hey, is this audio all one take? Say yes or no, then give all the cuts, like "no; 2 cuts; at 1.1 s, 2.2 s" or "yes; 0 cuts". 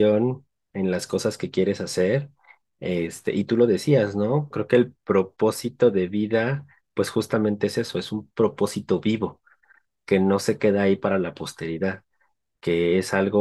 no; 1 cut; at 4.5 s